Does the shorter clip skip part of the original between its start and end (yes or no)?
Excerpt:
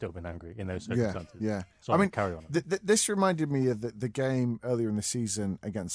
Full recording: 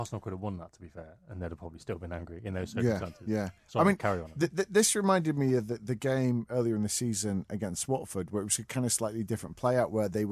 no